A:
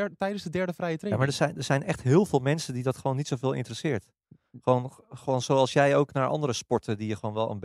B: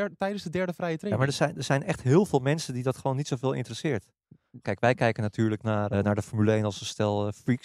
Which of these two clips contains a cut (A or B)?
B